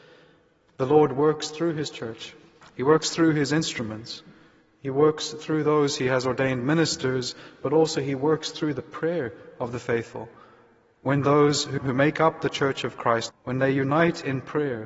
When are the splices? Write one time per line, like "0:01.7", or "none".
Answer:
0:11.8
0:13.3